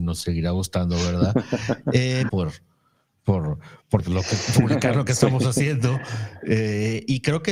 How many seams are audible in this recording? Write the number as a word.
two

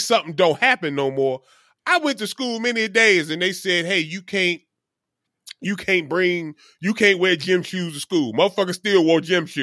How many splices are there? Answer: zero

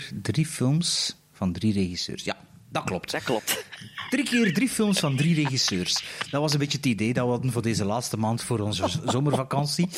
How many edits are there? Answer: zero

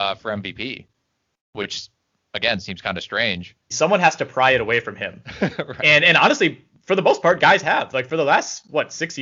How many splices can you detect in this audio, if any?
one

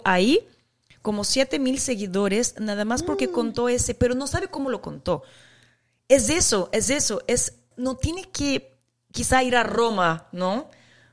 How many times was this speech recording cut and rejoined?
one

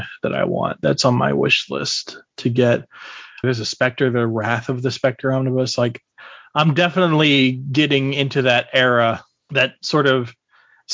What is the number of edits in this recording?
one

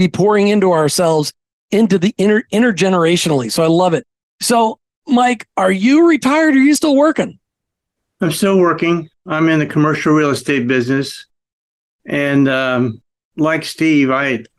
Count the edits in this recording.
zero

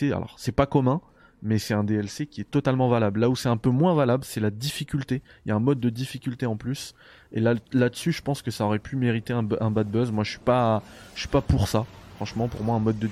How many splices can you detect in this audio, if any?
zero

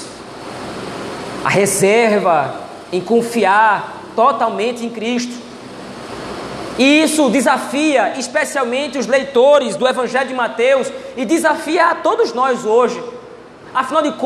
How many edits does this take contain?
zero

